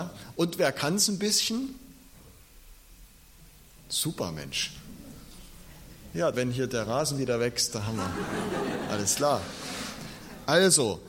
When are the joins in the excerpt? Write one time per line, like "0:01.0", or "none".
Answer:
0:06.3